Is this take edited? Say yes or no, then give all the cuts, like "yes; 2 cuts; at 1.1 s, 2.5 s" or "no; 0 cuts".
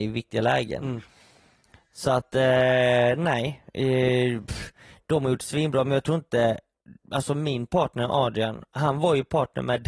no; 0 cuts